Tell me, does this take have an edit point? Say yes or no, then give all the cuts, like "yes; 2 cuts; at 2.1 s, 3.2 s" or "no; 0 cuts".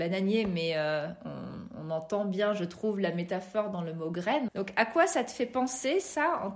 yes; 1 cut; at 4.5 s